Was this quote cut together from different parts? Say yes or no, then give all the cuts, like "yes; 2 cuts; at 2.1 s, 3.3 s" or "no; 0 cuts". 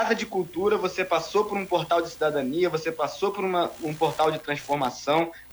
no; 0 cuts